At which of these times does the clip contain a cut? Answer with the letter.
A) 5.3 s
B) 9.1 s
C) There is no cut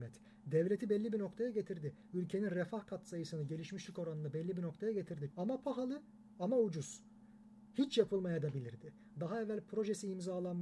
A